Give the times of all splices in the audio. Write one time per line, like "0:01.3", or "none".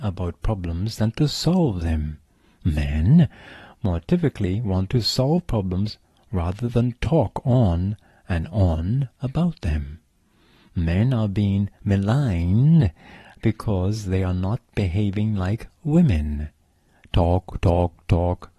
none